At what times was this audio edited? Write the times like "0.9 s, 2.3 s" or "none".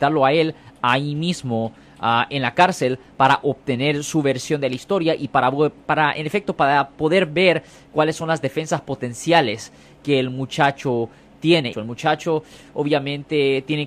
5.8 s, 11.7 s